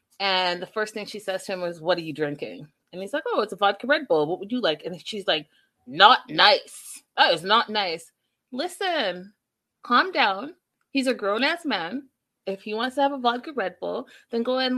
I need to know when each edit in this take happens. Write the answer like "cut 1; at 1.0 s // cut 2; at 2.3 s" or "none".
cut 1; at 9.7 s // cut 2; at 12.4 s